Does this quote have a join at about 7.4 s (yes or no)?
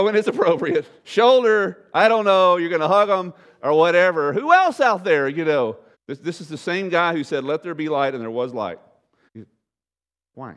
no